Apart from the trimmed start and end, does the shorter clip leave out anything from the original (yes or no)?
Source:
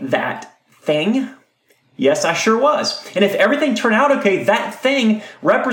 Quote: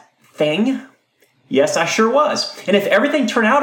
no